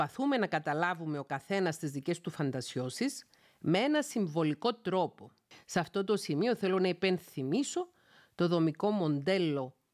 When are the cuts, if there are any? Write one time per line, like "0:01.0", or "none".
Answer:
0:05.5